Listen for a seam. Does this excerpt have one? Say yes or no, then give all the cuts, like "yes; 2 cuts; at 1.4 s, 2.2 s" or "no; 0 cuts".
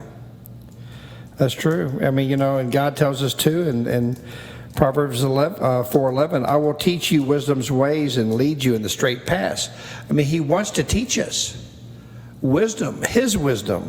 no; 0 cuts